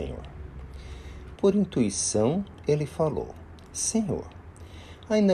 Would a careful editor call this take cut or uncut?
cut